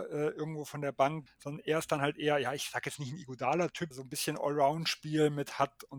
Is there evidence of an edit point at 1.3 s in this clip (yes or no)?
yes